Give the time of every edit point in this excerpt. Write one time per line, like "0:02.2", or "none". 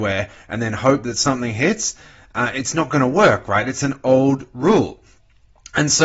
none

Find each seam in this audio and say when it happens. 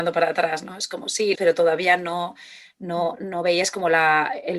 0:01.3
0:03.1

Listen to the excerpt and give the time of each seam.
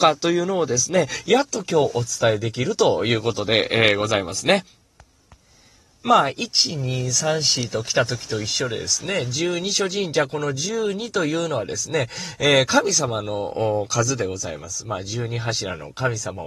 none

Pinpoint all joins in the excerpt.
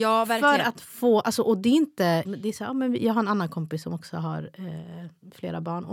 0:02.2

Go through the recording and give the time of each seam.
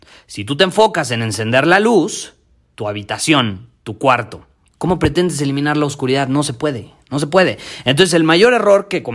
0:02.7
0:04.7

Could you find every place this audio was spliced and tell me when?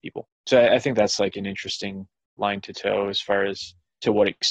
0:02.4

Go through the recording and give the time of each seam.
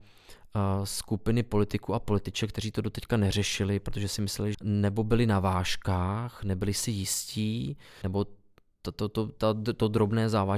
0:04.5
0:08.0

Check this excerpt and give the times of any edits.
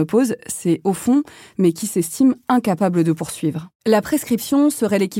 0:01.5
0:03.7

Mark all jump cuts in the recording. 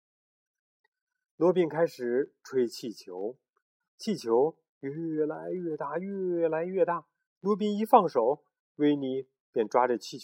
none

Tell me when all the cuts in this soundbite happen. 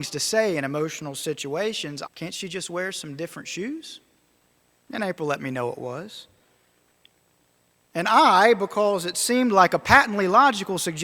0:02.1
0:04.8

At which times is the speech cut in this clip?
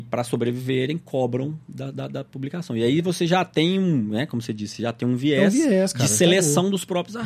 none

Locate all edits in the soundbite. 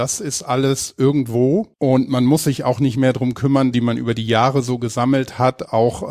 0:01.7
0:03.7

